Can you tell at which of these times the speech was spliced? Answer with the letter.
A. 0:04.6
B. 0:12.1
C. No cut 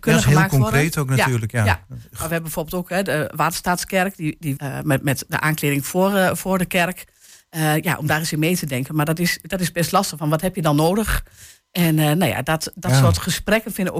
A